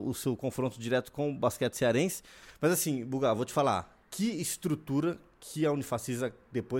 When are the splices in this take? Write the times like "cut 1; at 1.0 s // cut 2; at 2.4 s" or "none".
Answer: cut 1; at 4.0 s

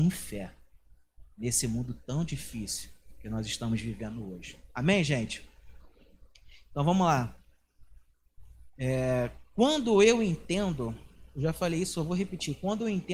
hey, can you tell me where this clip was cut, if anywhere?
cut 1; at 8.7 s

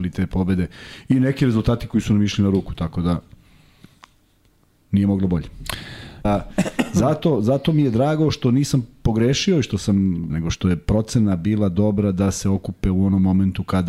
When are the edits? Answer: cut 1; at 6.2 s // cut 2; at 10.3 s

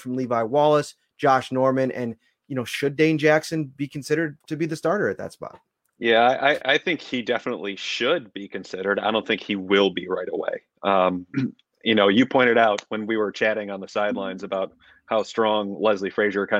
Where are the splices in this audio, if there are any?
cut 1; at 4.4 s // cut 2; at 11.3 s

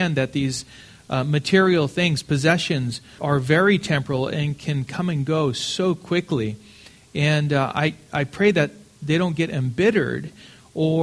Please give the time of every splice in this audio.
cut 1; at 3.2 s

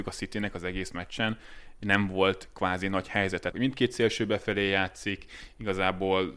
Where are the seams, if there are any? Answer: cut 1; at 3.5 s

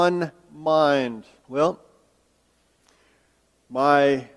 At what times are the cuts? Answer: cut 1; at 1.4 s

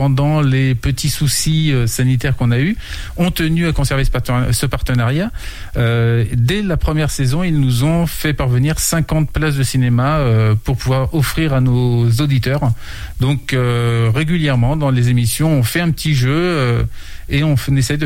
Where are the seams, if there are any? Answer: none

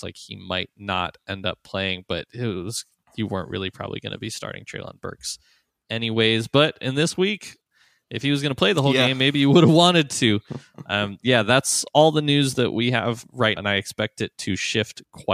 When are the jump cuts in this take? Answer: cut 1; at 11.2 s // cut 2; at 13.6 s

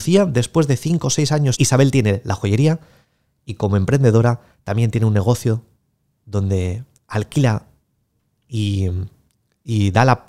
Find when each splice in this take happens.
cut 1; at 1.5 s

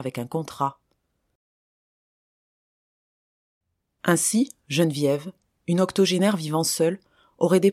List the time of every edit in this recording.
none

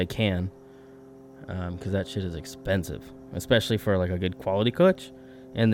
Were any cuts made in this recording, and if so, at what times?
none

